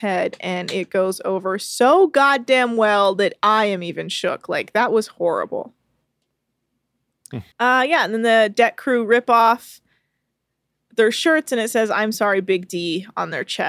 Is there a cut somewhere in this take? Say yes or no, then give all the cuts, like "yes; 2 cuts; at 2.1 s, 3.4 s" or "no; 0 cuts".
yes; 1 cut; at 7.5 s